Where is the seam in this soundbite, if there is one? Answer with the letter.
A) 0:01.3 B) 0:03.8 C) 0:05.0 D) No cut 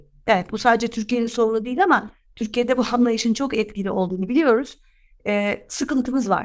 D